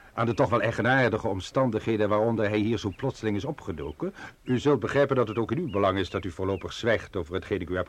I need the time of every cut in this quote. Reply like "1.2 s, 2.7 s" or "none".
4.3 s